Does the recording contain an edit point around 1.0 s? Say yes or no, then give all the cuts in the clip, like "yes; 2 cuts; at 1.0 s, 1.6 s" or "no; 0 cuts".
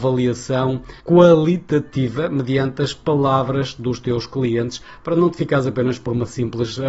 yes; 1 cut; at 1.0 s